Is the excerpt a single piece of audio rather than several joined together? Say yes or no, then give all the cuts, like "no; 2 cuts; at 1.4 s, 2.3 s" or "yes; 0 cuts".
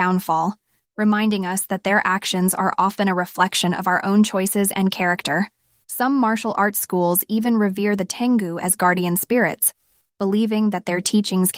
no; 1 cut; at 5.8 s